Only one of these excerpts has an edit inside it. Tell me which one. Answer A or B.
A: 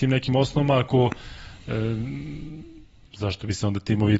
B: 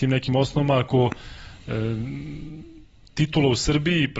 A